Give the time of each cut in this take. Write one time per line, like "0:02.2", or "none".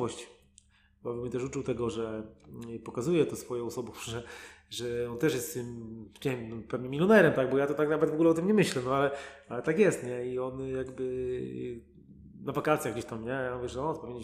none